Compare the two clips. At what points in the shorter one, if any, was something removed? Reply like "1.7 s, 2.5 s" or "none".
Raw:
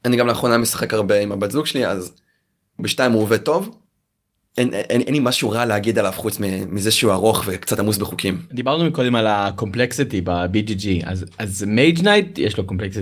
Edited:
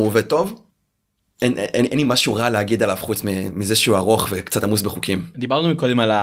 none

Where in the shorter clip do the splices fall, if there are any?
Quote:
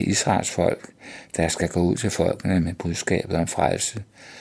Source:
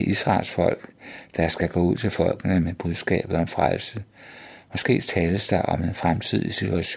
none

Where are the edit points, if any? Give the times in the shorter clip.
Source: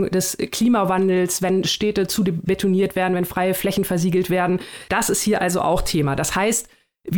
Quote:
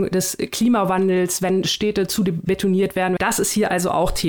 3.2 s

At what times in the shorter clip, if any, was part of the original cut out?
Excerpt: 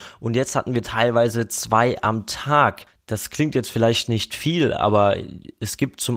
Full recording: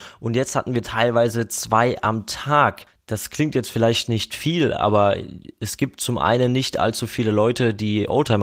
none

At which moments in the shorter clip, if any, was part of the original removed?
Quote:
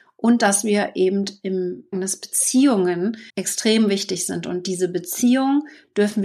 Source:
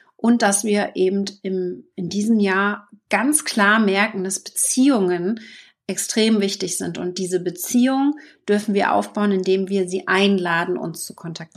1.9 s, 3.3 s

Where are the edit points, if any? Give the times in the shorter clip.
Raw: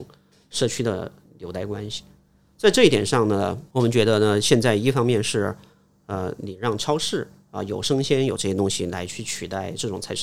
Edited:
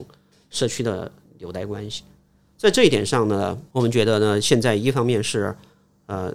none

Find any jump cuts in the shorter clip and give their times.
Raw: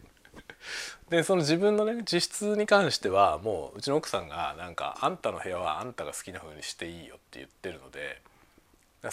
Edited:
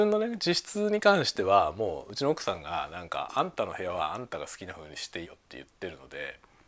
5.3 s

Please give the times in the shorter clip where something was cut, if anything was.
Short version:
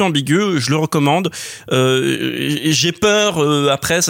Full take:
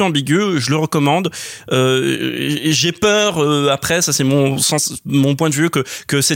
none

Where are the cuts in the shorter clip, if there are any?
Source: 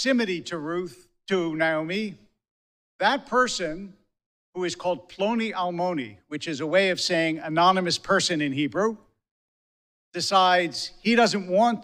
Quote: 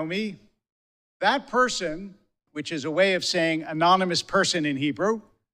2.5 s

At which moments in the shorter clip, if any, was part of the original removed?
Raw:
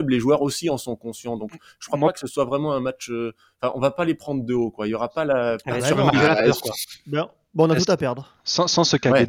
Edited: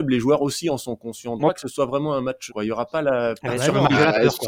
1.4 s, 2.5 s

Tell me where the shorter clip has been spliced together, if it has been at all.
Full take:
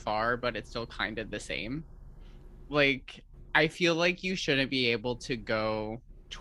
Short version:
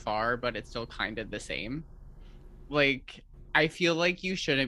none

